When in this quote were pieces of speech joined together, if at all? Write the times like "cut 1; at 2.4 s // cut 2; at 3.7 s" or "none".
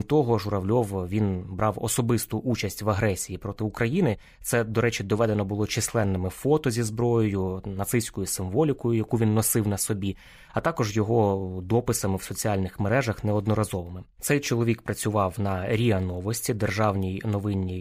cut 1; at 14.1 s